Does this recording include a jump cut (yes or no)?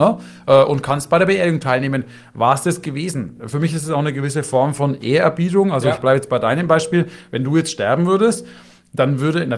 no